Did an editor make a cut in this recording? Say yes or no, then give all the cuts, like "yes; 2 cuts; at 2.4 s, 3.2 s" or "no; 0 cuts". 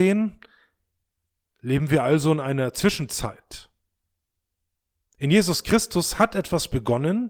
no; 0 cuts